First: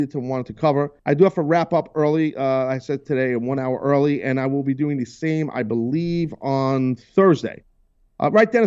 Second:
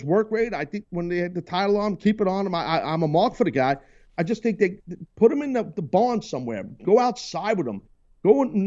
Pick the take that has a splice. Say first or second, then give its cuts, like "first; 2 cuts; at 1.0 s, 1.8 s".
first; 1 cut; at 1.0 s